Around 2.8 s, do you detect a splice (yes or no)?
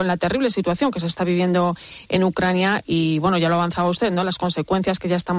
yes